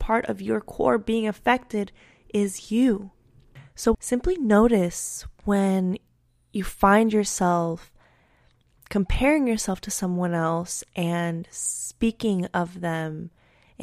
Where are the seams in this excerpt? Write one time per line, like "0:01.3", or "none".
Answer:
0:03.9